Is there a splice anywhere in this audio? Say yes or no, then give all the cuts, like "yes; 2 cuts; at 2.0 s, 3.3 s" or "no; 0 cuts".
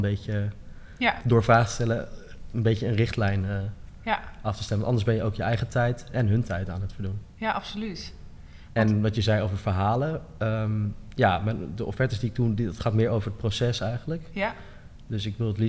no; 0 cuts